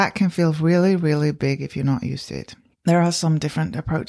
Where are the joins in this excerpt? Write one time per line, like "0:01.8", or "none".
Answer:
0:02.7